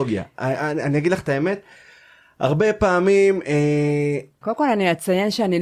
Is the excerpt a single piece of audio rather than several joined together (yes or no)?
no